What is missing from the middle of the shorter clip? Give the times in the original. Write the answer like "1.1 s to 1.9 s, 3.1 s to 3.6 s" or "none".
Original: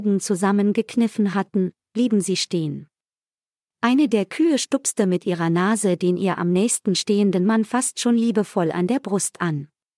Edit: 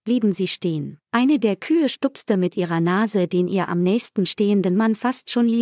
2.9 s to 3.7 s